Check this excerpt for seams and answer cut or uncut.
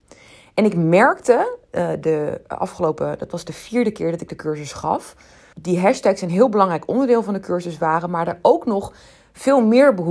cut